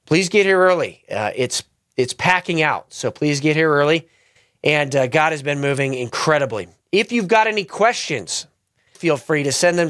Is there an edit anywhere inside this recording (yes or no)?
yes